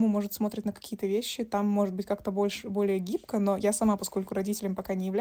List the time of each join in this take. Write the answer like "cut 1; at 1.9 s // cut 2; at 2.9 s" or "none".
none